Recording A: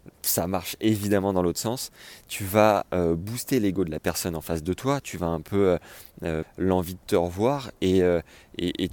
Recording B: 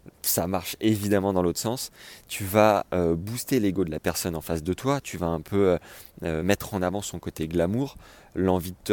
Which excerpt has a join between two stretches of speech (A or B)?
A